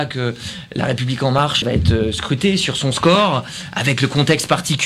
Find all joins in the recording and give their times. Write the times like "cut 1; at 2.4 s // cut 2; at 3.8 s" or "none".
cut 1; at 1.6 s